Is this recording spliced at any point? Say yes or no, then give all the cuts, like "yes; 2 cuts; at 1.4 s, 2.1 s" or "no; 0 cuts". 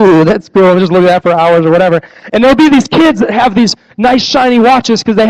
no; 0 cuts